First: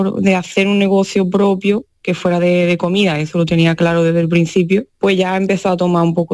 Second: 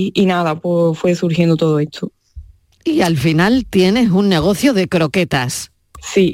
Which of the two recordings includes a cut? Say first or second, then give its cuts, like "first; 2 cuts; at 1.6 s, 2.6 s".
first; 1 cut; at 4.9 s